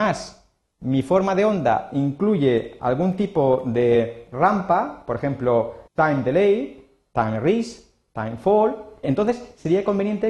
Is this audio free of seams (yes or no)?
no